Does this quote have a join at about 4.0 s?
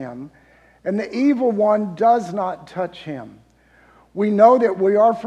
no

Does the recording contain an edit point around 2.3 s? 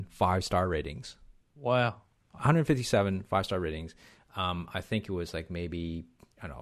yes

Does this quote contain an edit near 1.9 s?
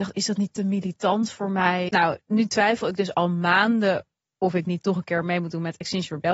yes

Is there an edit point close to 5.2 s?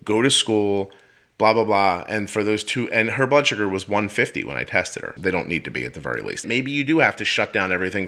yes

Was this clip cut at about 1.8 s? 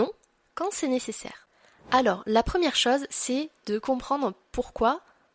no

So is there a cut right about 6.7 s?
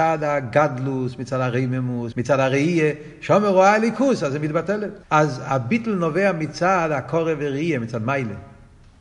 no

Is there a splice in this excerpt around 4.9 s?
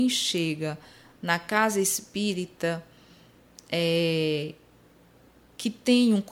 no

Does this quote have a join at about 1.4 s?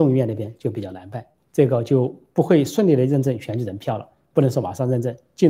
yes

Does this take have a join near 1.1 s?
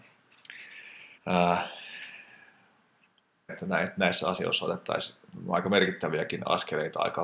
yes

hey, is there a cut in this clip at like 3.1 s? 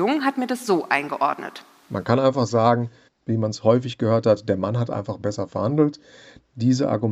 yes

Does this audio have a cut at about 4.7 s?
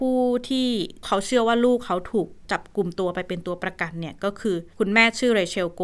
yes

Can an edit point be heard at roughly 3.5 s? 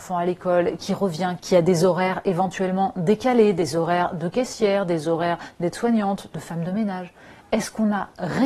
no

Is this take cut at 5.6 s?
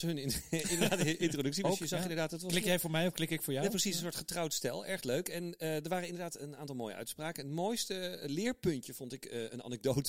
no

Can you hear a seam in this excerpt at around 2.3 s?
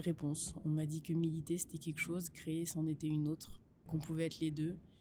no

